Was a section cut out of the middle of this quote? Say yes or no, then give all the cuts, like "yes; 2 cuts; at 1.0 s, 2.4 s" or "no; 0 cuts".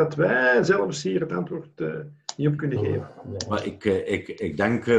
no; 0 cuts